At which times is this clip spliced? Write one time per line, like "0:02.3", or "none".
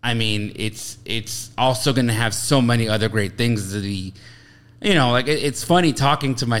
none

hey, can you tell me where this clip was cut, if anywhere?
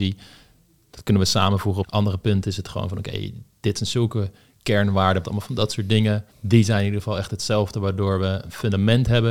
0:01.8
0:05.2
0:06.3

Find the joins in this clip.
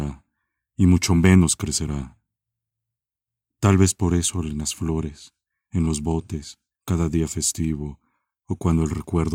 0:06.7

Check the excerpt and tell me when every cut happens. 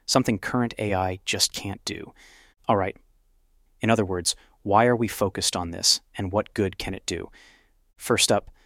0:03.7

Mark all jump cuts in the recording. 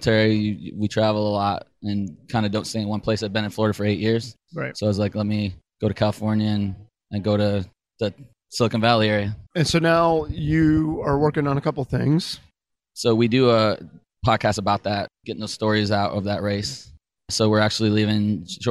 0:09.5
0:12.8

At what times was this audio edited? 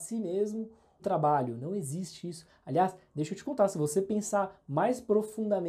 0:01.0

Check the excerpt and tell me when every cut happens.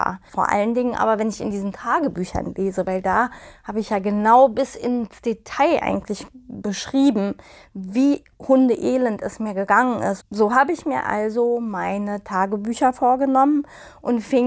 0:10.2

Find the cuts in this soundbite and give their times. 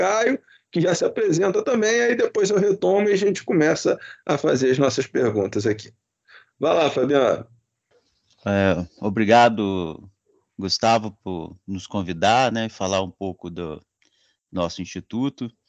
none

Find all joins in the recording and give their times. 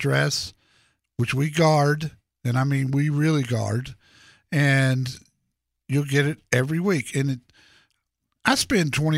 none

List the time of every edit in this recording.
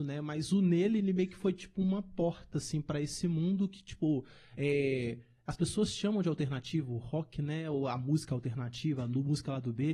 none

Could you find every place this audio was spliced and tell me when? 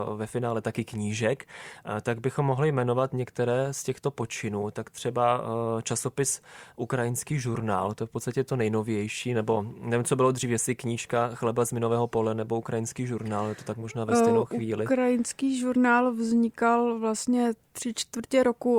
none

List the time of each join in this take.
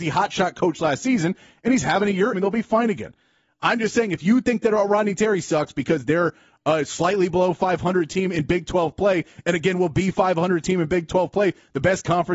0:02.3

